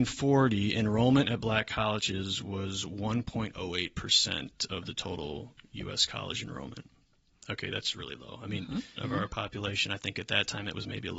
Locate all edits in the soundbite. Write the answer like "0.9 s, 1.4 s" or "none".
9.0 s